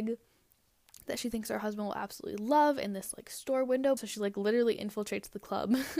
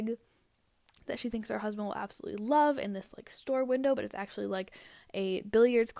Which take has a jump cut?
first; 1 cut; at 4.0 s

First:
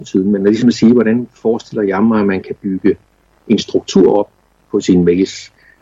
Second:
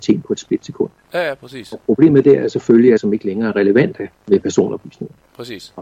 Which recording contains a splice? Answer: second; 2 cuts; at 3.0 s, 4.2 s

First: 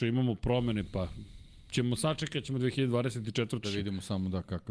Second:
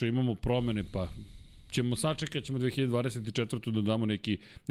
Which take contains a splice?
first; 1 cut; at 3.6 s

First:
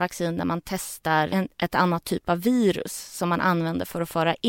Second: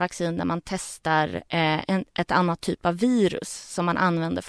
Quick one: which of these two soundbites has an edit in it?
first; 1 cut; at 1.3 s

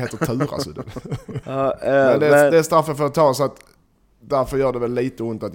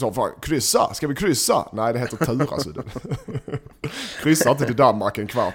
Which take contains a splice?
first; 1 cut; at 1.4 s

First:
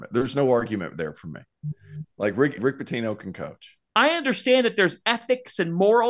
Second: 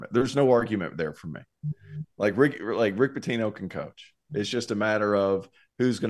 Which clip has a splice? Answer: first; 2 cuts; at 2.6 s, 3.9 s

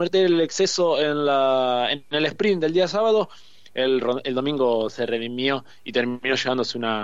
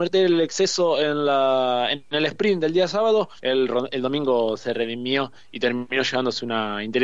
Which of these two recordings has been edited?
second; 1 cut; at 3.4 s

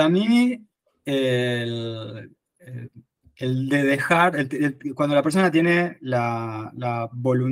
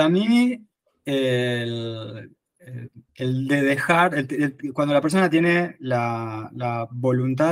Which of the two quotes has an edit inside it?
second; 1 cut; at 3.1 s

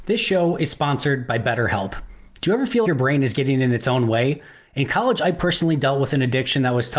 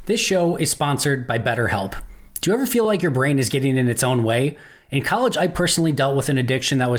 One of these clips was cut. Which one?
first; 1 cut; at 2.8 s

